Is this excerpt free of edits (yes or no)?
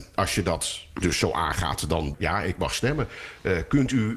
no